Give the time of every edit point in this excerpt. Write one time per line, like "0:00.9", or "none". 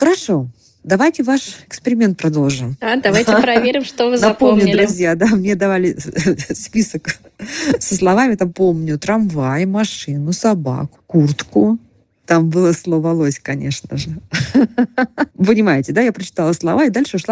0:10.9
0:15.3